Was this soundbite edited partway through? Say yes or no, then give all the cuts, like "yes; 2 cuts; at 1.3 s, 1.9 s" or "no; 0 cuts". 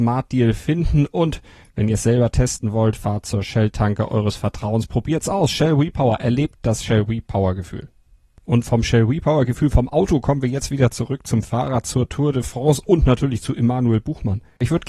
no; 0 cuts